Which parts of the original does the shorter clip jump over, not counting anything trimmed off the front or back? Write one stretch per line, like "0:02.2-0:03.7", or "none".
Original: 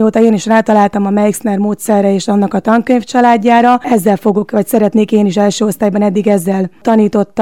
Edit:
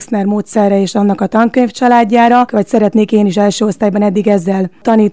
0:03.8-0:04.5

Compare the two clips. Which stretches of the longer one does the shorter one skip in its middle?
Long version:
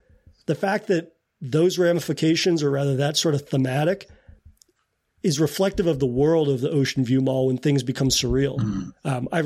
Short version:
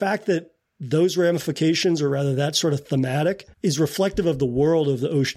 0:04.1-0:05.1

